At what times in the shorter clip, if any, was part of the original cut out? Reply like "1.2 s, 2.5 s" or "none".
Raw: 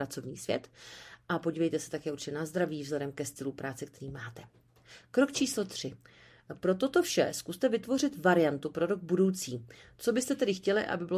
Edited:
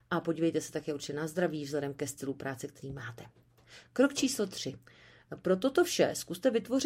none